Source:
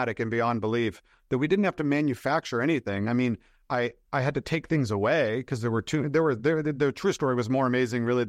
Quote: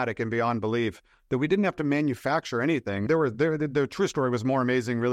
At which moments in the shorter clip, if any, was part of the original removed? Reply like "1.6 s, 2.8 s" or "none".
3.1 s

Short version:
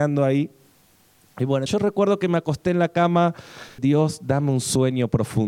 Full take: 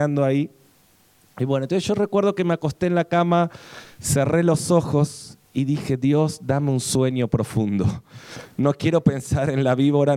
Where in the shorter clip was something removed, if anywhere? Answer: 1.7 s, 3.8 s

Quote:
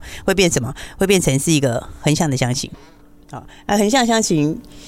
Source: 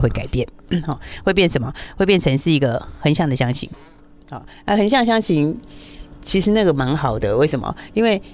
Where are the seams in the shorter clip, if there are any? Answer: none

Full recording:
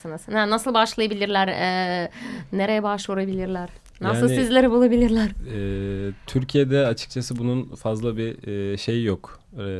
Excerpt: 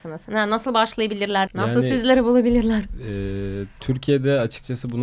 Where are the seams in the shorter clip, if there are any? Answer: 1.5 s

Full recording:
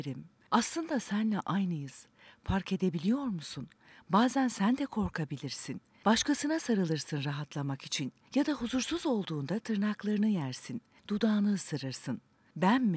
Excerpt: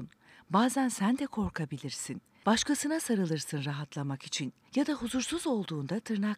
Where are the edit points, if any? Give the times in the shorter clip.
none

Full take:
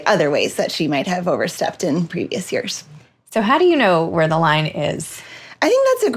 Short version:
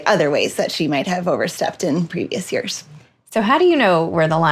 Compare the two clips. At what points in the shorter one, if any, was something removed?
none

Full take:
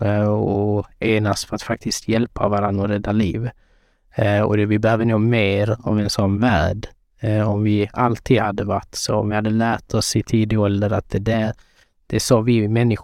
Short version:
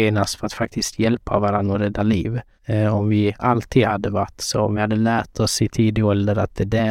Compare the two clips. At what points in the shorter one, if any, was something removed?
2.6 s

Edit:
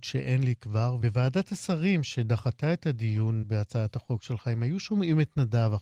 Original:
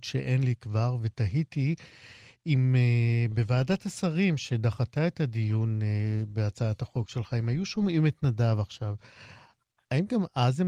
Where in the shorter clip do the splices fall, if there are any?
1.0 s, 3.4 s

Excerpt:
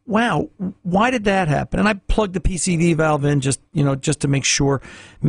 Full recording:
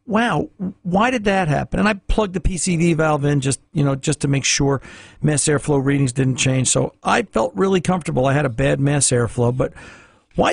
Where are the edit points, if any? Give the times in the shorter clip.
none

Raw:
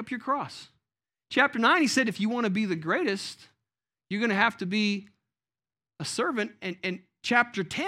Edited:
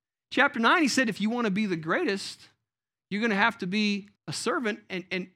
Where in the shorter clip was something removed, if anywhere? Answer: 4.2 s

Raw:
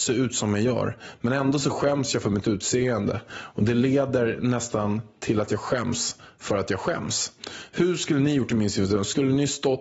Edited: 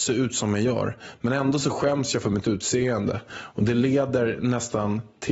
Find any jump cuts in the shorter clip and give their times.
none

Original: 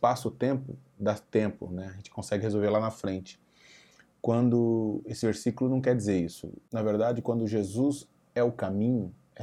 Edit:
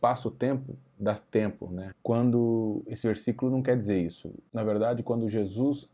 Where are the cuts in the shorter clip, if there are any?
1.9 s

